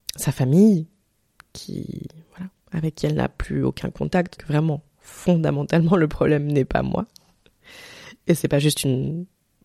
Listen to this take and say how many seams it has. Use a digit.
1